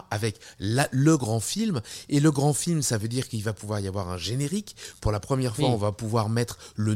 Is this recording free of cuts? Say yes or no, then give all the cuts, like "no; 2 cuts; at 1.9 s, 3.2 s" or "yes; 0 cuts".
yes; 0 cuts